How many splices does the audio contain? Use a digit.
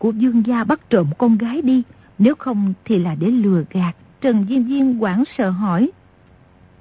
2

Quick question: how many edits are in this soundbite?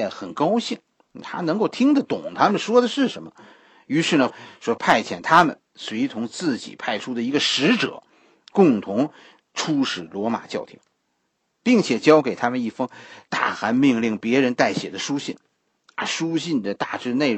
1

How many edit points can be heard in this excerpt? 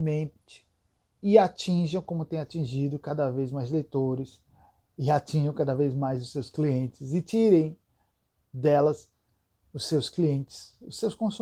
0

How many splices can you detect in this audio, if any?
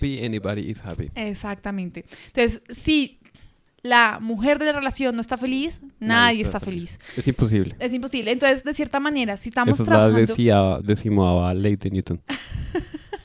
0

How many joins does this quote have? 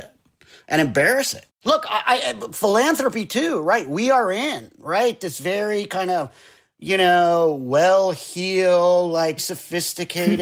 1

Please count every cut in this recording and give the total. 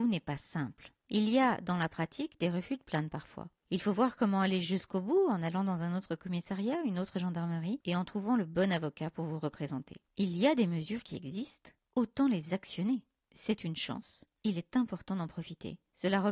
2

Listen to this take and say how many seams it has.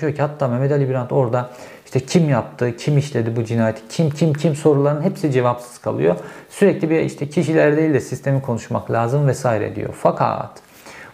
0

